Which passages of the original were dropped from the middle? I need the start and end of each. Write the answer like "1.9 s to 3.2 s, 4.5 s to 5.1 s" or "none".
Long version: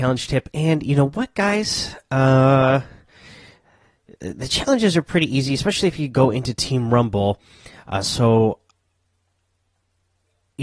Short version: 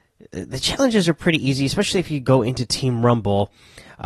none